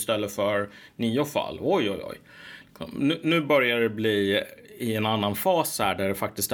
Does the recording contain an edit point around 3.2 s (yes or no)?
no